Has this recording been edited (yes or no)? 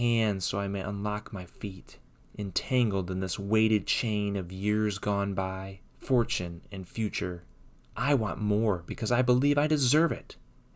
yes